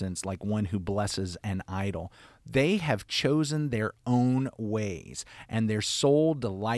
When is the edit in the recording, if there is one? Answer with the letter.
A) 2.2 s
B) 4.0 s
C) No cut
C